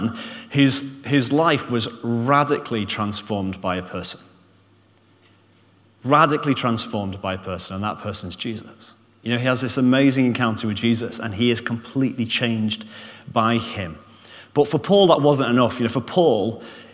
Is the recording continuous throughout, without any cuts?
yes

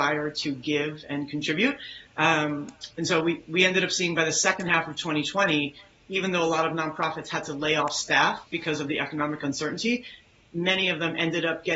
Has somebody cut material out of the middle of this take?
no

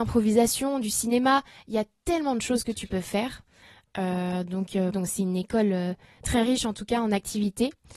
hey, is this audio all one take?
no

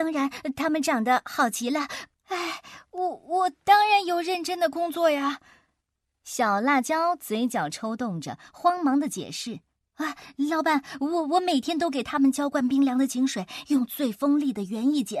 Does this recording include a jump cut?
yes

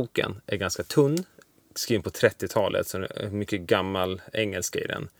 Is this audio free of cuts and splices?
yes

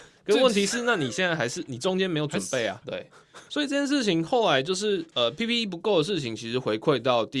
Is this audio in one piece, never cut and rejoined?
no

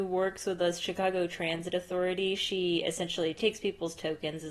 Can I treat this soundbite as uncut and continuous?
yes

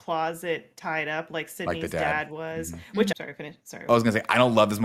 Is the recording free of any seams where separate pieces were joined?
no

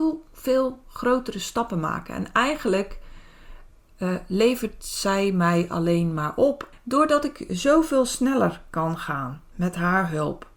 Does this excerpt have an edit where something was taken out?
yes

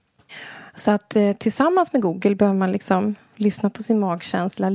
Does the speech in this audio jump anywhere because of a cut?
no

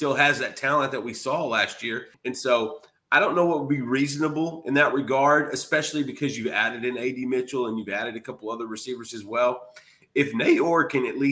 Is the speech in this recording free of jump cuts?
no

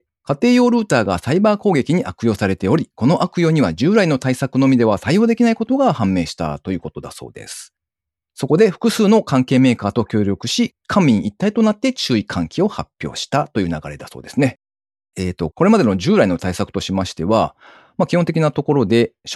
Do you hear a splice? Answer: no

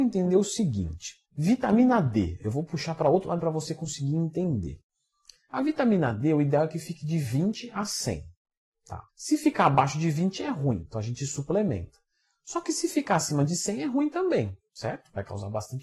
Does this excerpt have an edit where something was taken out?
yes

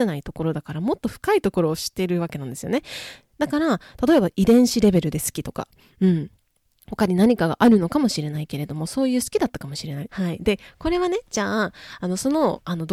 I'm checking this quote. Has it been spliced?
yes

